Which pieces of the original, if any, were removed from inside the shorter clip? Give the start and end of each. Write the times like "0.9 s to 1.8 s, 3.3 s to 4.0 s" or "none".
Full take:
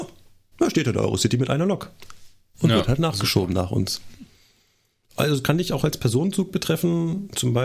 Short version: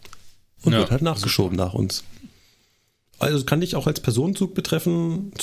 none